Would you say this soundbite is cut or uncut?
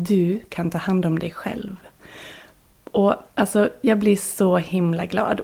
uncut